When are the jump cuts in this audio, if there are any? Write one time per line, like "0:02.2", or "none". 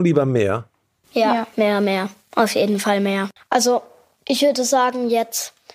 0:01.5
0:03.4